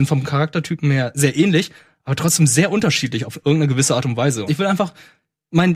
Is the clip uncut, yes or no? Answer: no